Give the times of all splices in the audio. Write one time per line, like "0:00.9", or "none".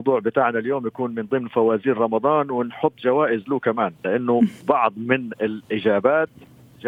0:04.6